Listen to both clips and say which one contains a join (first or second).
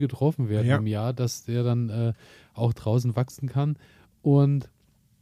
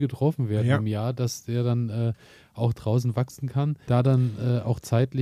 second